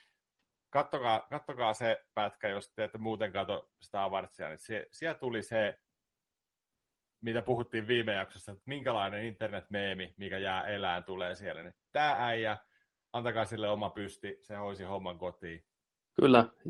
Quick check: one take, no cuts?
yes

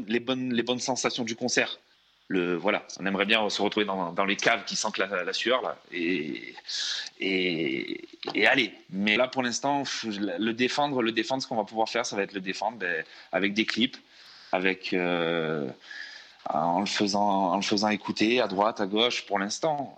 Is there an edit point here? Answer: yes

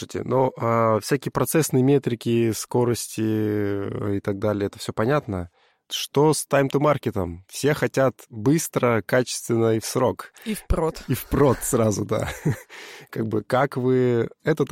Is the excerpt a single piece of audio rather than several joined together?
yes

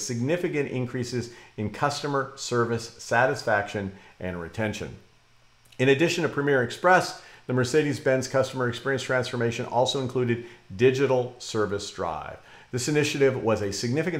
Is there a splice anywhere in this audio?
no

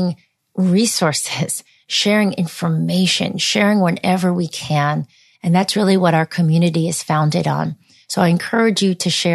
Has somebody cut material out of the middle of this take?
no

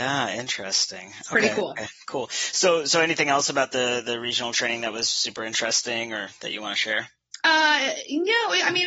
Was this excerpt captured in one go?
yes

